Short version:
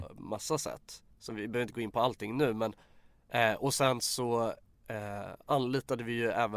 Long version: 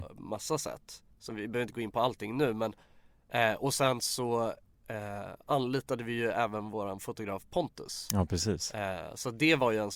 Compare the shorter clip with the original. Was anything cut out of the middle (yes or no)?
no